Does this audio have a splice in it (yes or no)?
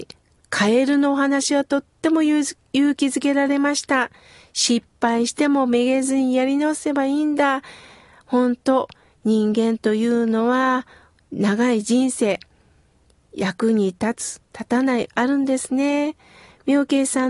no